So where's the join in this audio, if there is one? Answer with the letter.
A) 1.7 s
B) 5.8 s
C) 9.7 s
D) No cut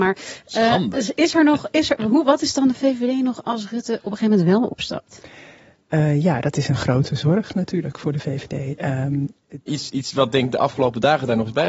C